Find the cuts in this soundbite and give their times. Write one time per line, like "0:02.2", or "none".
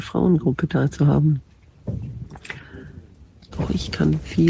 0:03.5